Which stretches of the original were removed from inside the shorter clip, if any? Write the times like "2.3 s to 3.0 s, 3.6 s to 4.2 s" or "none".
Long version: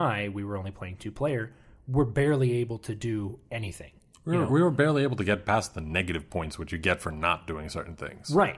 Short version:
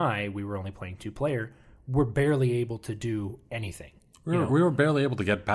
none